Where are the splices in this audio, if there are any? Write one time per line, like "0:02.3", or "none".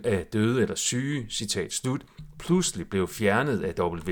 none